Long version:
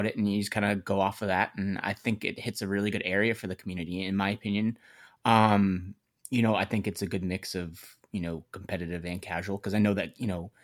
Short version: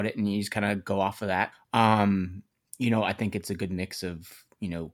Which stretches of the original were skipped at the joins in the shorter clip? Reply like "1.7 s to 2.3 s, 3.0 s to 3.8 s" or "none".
1.5 s to 5.0 s